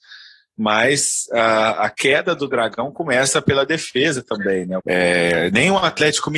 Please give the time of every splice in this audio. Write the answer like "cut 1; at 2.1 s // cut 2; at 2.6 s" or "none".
cut 1; at 4.8 s